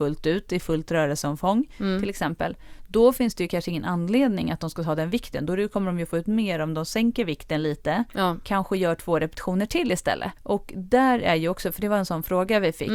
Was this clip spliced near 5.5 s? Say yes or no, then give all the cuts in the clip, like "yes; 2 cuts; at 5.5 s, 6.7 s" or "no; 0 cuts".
no; 1 cut; at 10.4 s